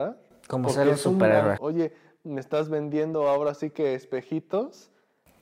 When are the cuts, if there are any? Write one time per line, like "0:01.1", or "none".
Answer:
0:01.6